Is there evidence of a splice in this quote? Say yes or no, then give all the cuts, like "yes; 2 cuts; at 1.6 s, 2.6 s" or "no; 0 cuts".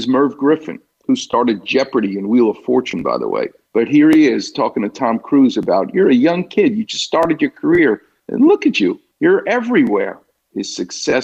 yes; 1 cut; at 3.7 s